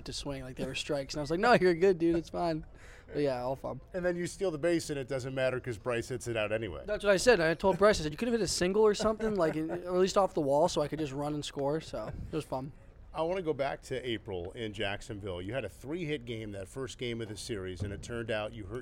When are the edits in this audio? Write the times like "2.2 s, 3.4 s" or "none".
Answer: none